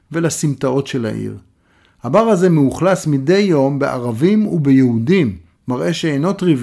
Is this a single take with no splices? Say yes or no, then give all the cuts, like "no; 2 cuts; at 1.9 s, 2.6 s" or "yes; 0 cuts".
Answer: yes; 0 cuts